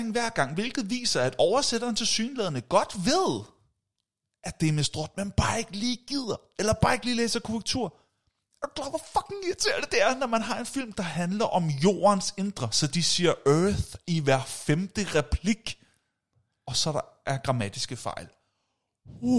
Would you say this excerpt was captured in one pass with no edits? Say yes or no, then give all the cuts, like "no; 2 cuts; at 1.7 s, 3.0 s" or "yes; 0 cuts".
yes; 0 cuts